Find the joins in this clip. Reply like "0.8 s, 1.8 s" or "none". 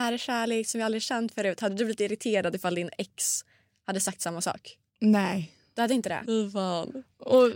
4.9 s, 6.2 s